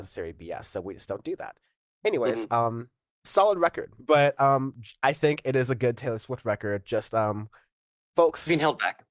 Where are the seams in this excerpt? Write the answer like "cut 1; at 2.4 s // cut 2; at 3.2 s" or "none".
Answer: cut 1; at 4.0 s